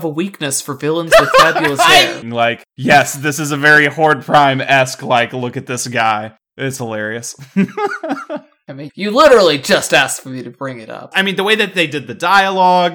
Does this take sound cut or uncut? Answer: cut